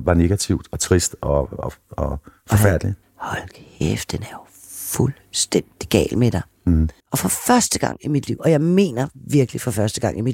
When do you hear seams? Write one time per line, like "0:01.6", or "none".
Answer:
0:03.0
0:07.0
0:08.4